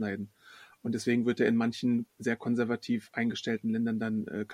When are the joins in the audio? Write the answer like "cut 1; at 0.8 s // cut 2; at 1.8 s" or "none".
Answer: none